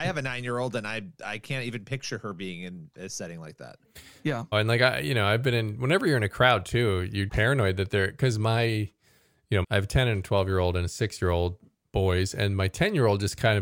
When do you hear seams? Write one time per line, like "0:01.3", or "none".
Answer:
0:04.5
0:07.3
0:09.6

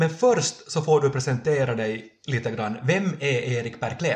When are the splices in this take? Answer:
none

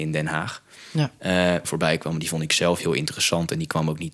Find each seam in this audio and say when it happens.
0:01.6

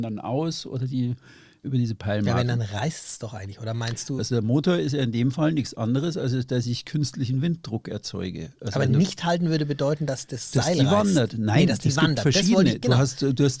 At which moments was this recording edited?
0:01.6
0:04.2

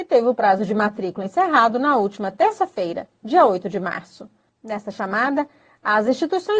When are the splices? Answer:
0:04.5

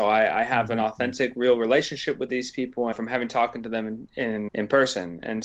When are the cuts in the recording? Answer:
0:02.9
0:04.5

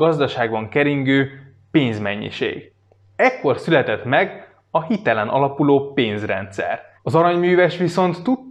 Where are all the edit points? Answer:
0:07.0

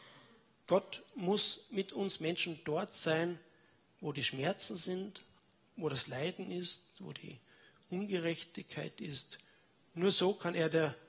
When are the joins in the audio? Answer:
none

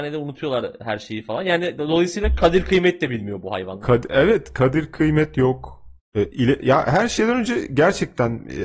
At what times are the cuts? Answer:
none

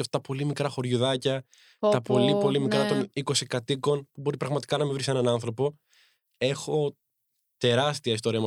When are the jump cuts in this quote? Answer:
none

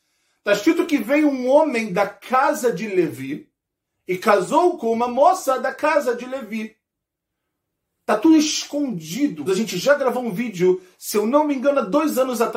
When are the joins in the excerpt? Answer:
0:09.5

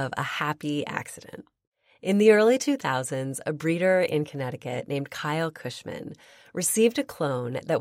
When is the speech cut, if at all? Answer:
none

